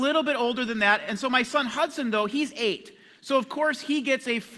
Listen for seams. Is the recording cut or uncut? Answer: uncut